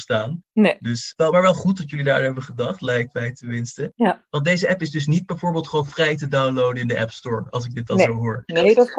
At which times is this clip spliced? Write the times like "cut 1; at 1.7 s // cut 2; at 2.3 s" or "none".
none

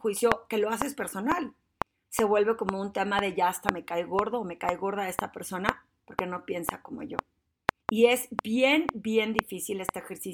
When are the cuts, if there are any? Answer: cut 1; at 2.0 s // cut 2; at 7.8 s

